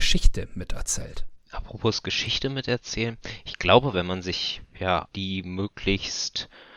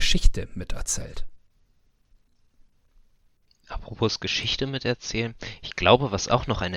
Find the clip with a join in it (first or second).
first